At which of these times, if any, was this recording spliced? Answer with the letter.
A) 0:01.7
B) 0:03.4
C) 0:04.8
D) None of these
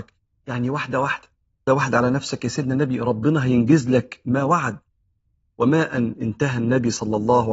A